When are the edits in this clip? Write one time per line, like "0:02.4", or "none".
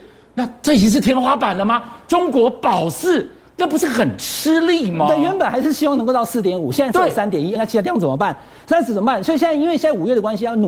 0:07.6